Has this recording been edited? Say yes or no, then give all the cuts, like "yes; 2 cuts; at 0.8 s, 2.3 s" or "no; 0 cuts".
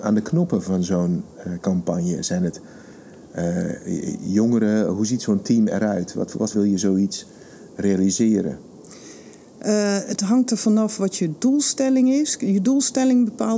yes; 1 cut; at 6.5 s